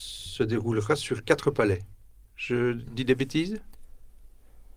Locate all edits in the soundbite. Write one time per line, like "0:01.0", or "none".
none